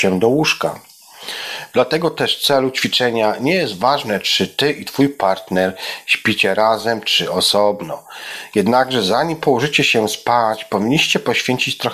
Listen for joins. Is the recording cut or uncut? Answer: cut